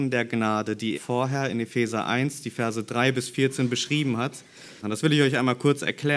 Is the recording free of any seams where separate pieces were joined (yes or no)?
no